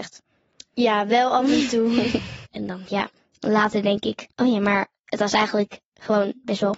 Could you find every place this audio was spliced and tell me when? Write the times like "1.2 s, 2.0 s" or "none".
2.5 s, 4.3 s